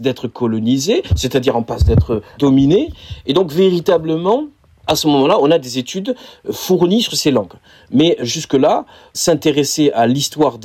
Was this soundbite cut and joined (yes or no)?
no